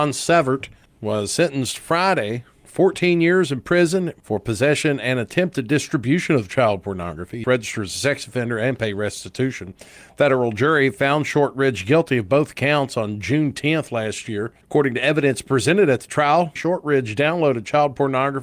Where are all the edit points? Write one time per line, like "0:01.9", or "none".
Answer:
0:14.6
0:16.6